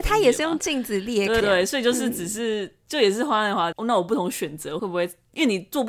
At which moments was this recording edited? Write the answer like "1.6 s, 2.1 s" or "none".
1.4 s, 3.7 s